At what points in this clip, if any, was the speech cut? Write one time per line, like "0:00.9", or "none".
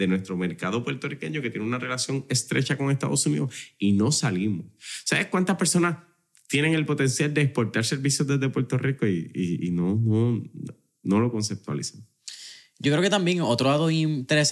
none